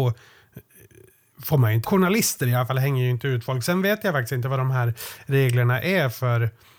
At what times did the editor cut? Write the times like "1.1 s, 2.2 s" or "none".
1.8 s

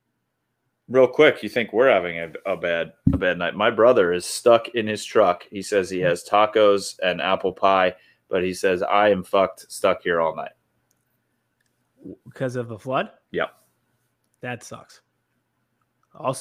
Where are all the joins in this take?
none

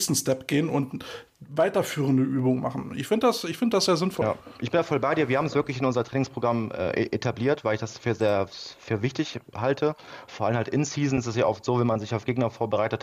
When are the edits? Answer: none

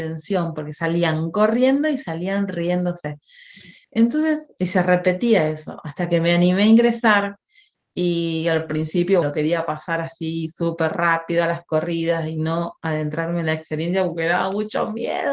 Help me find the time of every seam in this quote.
9.2 s

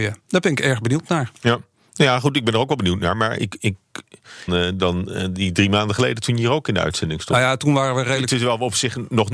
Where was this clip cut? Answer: 4.5 s

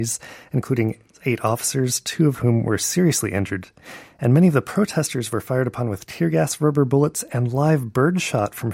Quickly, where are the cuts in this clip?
none

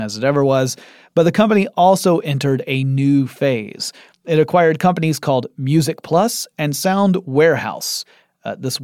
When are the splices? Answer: none

